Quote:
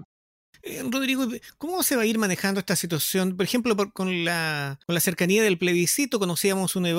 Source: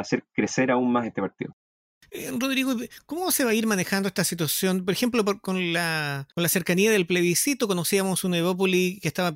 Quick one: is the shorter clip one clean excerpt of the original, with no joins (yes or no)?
yes